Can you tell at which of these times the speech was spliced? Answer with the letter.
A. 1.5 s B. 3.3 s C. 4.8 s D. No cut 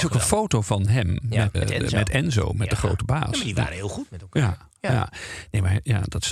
A